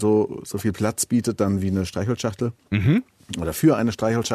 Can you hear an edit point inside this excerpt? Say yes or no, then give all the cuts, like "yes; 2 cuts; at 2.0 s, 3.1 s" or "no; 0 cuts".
no; 0 cuts